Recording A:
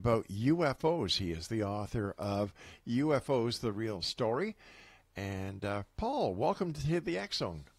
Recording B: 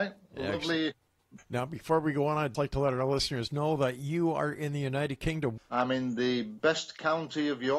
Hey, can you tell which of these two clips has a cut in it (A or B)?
B